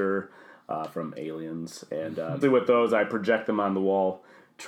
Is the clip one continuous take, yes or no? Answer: no